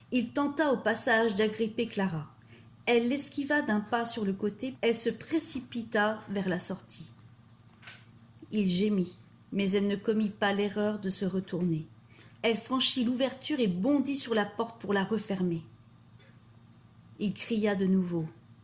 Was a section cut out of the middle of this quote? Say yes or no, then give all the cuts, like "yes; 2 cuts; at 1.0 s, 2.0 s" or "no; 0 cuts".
yes; 1 cut; at 4.7 s